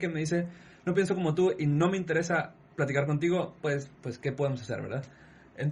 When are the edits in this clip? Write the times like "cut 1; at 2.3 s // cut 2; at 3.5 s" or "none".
cut 1; at 3.9 s